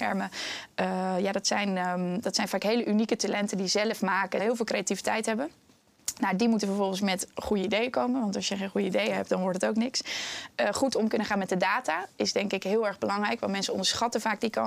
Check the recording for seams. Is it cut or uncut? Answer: cut